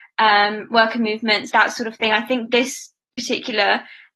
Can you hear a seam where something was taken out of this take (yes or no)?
yes